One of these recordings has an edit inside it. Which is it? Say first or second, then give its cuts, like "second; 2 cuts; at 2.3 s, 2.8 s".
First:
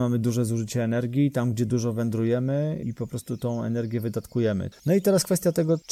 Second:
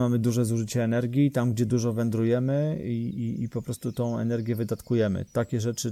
first; 2 cuts; at 2.8 s, 4.7 s